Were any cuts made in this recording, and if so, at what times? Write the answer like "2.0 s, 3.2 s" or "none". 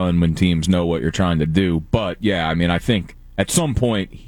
none